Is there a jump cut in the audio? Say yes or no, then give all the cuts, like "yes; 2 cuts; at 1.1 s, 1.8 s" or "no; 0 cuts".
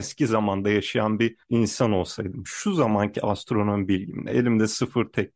no; 0 cuts